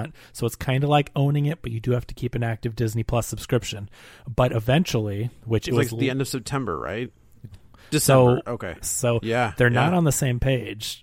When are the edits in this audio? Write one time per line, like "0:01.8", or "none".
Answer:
0:07.5
0:08.8